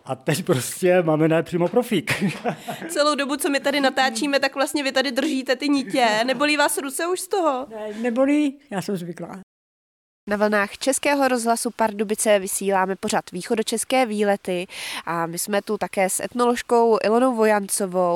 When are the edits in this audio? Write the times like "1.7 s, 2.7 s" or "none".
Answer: none